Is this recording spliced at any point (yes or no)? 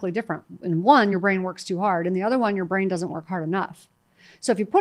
no